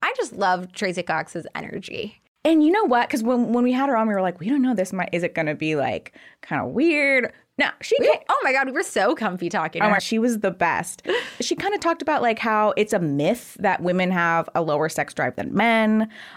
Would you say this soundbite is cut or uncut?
cut